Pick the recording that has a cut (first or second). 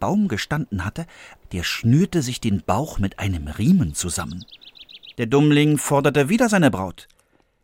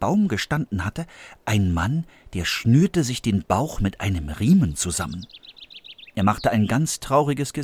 first